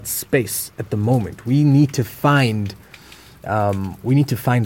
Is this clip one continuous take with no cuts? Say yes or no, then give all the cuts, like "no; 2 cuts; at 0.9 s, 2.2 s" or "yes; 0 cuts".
yes; 0 cuts